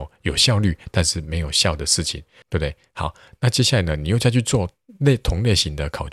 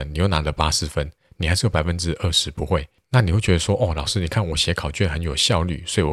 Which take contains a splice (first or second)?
first